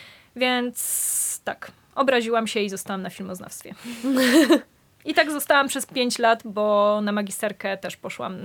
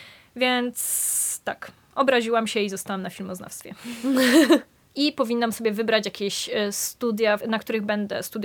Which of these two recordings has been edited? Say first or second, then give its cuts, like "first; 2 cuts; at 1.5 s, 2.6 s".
second; 2 cuts; at 4.9 s, 7.4 s